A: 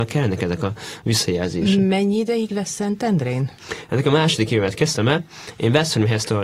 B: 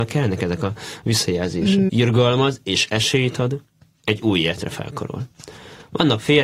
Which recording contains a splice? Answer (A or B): B